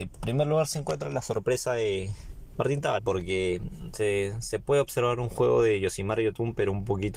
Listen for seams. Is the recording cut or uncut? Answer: cut